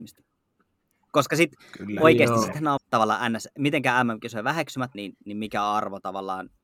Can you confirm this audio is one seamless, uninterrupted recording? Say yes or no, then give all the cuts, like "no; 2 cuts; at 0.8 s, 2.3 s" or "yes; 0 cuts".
no; 2 cuts; at 2.8 s, 4.9 s